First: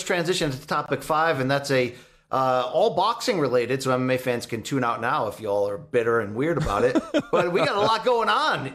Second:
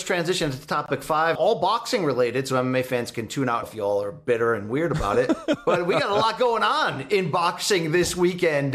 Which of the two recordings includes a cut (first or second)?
second